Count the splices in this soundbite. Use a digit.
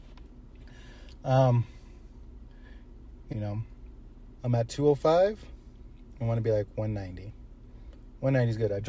2